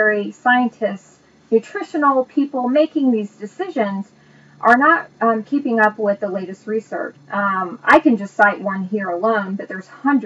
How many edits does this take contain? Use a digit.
1